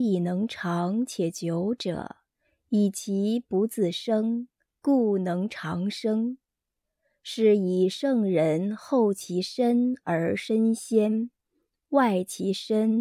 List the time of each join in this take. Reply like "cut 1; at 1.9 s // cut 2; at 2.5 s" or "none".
none